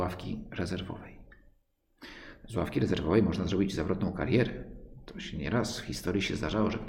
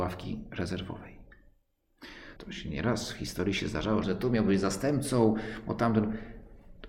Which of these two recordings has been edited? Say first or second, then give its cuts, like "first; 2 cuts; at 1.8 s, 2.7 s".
second; 2 cuts; at 2.4 s, 4.0 s